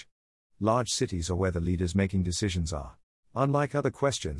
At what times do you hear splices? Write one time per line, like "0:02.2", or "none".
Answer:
0:03.2